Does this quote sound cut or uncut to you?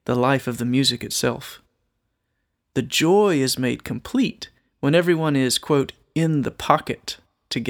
uncut